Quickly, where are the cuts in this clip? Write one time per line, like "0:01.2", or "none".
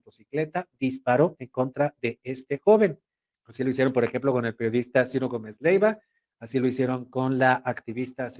0:03.3